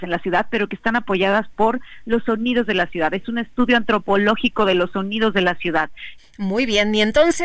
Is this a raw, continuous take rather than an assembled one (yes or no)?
no